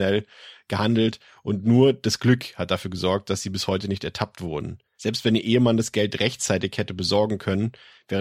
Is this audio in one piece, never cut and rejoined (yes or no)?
no